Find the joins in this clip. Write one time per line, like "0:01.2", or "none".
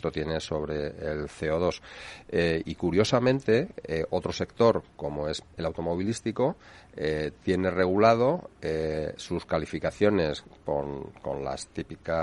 0:02.6